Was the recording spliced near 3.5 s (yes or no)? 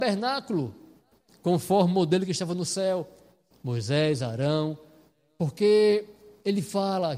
yes